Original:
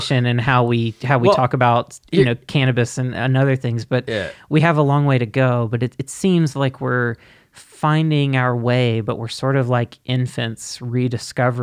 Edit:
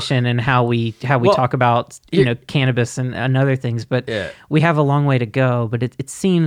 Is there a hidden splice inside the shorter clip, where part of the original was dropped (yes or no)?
no